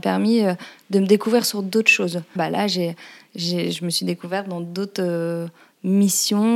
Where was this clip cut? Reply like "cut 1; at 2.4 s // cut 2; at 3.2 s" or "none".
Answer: cut 1; at 2.4 s